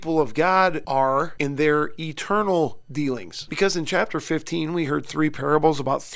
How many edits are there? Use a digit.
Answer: 1